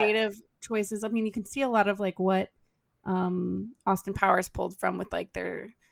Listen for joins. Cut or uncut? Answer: uncut